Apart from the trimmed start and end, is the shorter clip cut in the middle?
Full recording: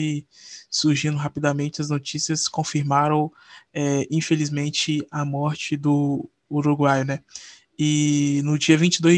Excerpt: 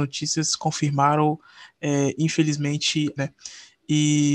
yes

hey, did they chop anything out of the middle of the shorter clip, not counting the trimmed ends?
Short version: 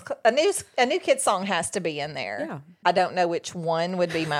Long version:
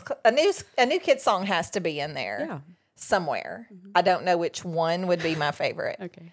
yes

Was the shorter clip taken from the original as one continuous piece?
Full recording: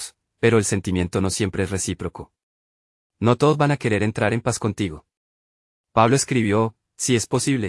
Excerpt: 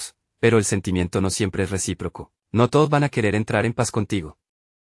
no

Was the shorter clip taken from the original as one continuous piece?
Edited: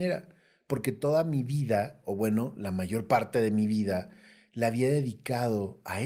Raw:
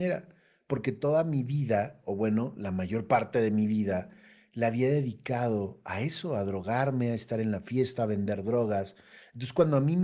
yes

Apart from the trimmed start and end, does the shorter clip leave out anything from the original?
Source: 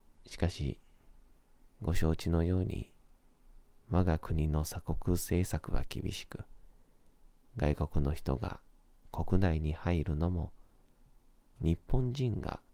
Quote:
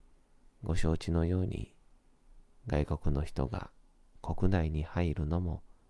yes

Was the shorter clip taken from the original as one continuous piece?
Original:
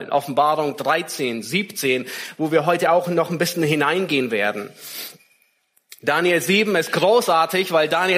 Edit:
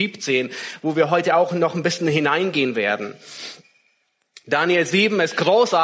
yes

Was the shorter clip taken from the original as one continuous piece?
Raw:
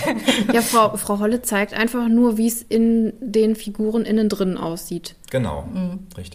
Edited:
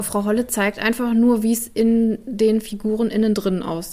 yes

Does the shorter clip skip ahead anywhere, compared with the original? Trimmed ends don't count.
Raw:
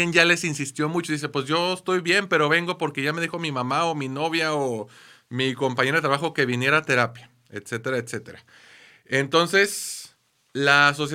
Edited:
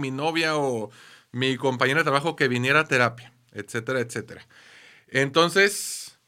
no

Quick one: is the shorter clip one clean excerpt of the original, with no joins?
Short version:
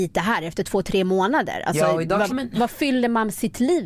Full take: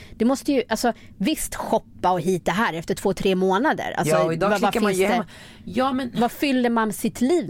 no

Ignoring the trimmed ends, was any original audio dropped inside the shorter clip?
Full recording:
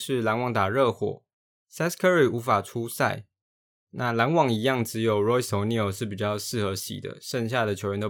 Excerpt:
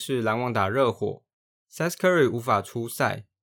no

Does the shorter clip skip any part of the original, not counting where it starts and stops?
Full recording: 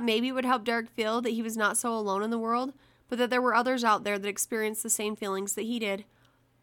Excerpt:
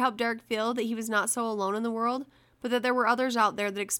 no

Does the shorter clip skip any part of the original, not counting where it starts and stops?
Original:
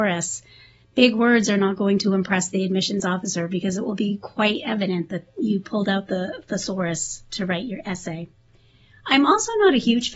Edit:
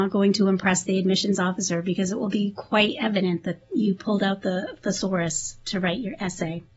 no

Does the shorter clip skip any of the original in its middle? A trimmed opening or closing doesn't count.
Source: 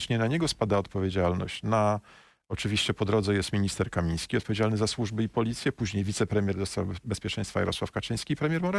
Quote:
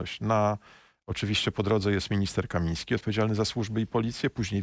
no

